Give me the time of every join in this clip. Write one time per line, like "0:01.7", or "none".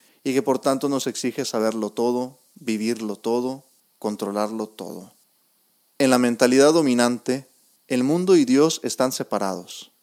0:05.9